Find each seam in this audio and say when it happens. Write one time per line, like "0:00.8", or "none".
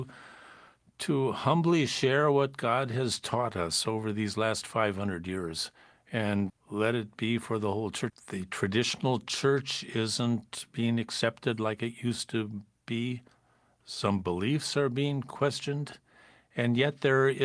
0:06.5
0:08.1